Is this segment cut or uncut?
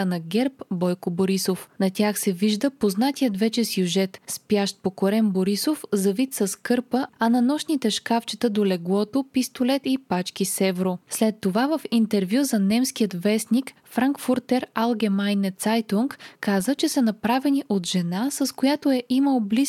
cut